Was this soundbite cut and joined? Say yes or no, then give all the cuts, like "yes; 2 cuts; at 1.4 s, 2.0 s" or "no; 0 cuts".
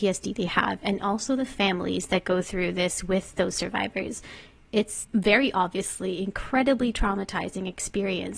no; 0 cuts